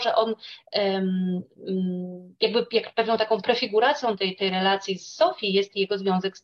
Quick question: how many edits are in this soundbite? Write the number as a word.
zero